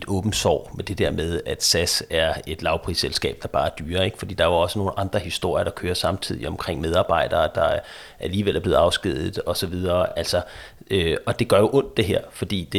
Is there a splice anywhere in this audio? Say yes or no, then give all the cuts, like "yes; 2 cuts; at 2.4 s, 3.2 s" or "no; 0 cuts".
no; 0 cuts